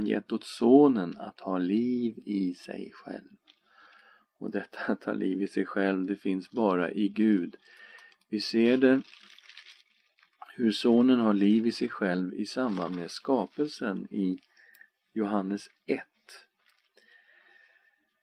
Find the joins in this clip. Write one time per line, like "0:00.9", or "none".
none

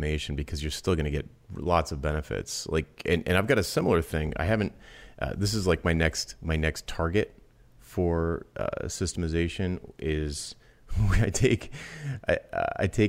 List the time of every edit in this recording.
none

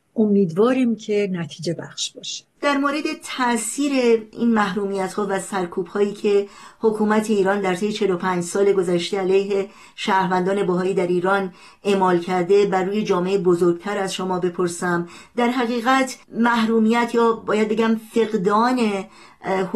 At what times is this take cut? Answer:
0:16.2

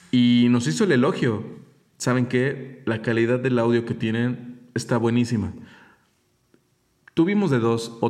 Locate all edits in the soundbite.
none

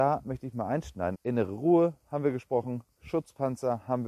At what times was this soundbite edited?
0:01.2

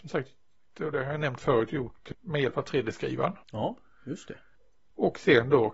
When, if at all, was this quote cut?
0:02.1
0:03.4

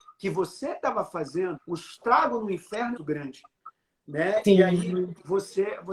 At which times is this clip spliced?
0:01.6
0:03.0

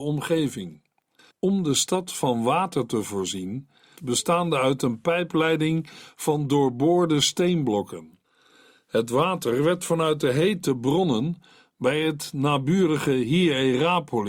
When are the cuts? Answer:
0:01.3
0:04.0

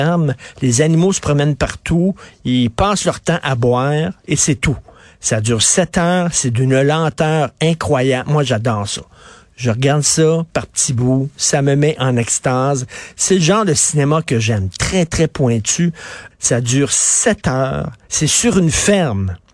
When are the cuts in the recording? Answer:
0:16.3
0:18.1

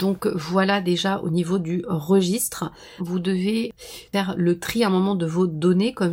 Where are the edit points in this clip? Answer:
0:03.0

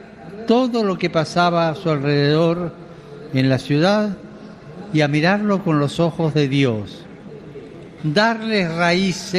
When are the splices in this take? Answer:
0:08.0

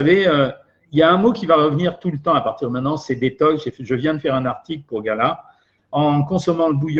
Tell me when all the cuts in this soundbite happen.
0:05.8

